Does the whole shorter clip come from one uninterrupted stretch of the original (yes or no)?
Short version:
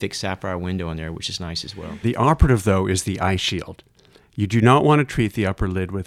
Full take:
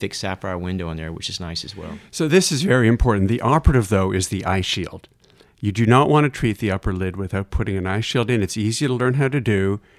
no